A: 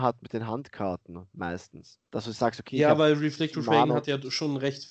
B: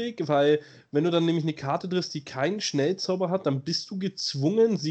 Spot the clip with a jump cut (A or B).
A